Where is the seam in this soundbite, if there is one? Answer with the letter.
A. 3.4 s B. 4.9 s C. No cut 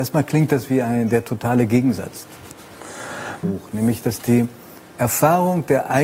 A